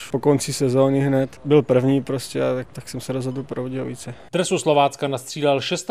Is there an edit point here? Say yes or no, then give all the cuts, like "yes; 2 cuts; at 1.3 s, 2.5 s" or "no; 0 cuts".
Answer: no; 0 cuts